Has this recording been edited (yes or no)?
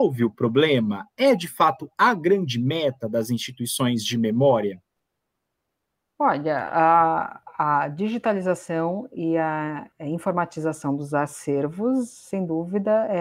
no